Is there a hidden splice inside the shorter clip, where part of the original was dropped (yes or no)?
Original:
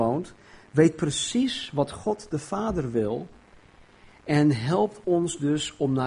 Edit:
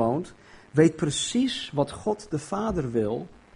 no